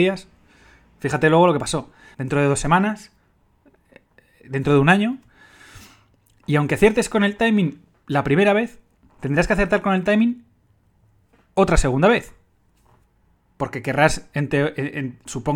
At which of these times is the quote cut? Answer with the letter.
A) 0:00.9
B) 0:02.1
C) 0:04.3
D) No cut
B